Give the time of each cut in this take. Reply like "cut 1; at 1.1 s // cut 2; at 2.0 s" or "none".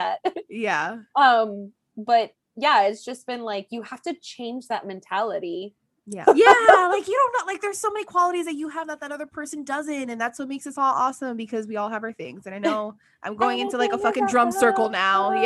cut 1; at 6.2 s